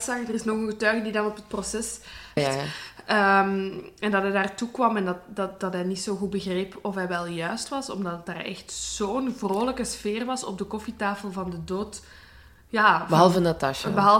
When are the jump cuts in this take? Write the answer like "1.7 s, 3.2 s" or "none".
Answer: 2.4 s